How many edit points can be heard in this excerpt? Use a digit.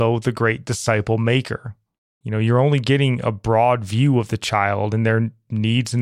1